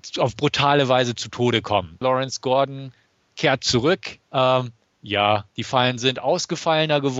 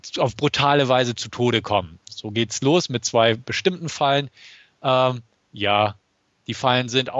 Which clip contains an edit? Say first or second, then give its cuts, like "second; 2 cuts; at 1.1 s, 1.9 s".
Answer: first; 3 cuts; at 2.0 s, 4.3 s, 5.5 s